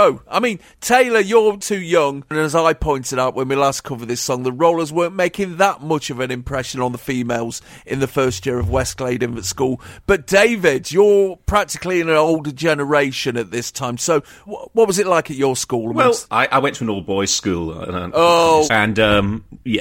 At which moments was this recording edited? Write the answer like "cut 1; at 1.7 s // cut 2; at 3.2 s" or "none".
cut 1; at 14.5 s // cut 2; at 18.7 s